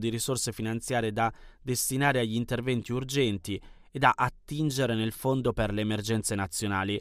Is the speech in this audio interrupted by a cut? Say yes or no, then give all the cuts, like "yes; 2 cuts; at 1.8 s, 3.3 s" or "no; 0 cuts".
no; 0 cuts